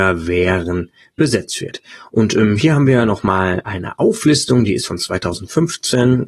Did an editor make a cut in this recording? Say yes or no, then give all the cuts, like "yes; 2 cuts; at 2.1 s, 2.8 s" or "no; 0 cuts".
no; 0 cuts